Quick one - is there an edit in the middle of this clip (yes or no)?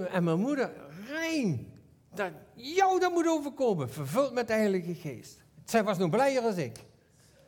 no